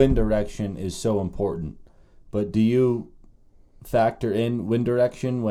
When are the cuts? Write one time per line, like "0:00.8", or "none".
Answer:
none